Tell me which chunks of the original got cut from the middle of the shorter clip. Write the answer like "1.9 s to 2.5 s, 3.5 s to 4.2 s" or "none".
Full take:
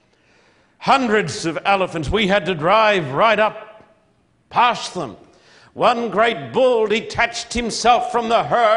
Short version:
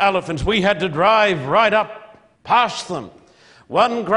4.0 s to 4.4 s